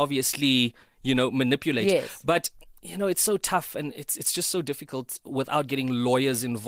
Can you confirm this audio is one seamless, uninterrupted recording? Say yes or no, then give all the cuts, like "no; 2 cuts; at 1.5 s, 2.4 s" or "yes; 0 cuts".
yes; 0 cuts